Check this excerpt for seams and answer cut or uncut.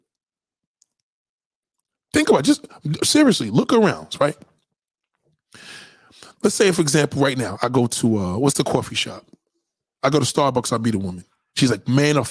uncut